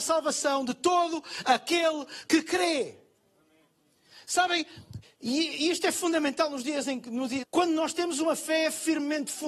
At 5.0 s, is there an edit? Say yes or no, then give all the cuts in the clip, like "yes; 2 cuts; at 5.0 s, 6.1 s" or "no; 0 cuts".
yes; 2 cuts; at 5.0 s, 7.4 s